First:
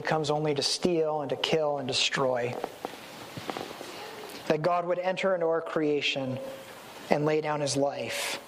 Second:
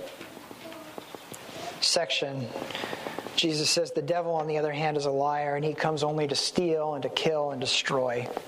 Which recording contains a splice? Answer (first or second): first